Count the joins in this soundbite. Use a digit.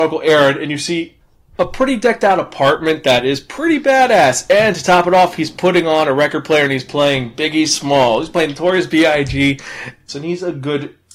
1